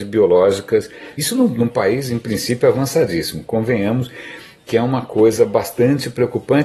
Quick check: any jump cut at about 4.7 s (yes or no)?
no